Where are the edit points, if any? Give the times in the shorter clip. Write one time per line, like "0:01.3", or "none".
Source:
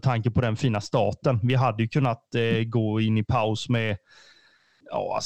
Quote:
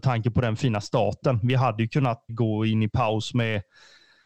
0:02.3